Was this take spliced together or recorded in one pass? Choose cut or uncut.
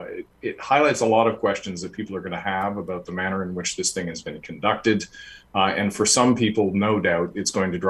uncut